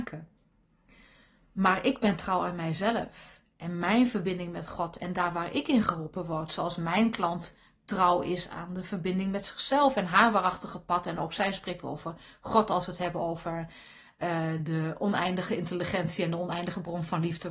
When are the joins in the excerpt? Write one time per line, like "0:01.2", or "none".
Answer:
none